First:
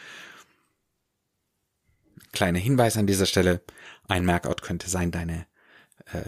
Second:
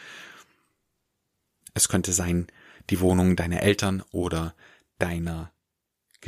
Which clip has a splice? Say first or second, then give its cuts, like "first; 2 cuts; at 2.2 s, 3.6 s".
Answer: second; 1 cut; at 1.6 s